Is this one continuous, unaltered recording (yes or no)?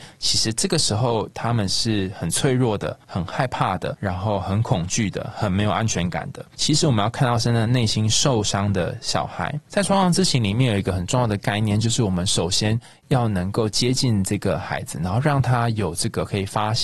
no